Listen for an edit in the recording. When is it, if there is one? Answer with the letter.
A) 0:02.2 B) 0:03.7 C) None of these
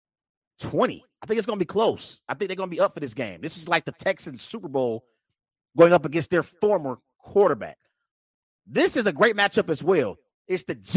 C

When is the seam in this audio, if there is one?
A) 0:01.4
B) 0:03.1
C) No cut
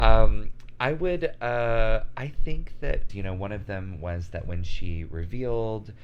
B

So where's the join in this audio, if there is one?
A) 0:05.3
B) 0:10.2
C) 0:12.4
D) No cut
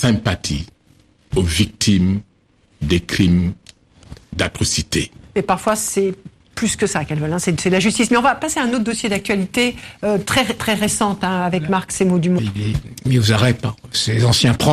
C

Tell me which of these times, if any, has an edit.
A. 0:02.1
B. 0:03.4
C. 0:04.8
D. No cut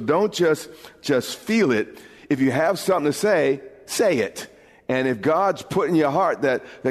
D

